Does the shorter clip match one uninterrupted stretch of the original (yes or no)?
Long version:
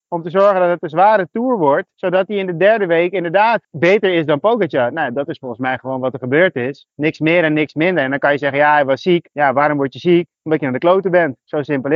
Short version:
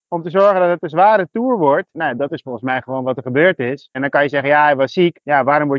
no